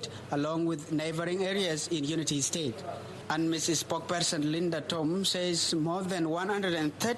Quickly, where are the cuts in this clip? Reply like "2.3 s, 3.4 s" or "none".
none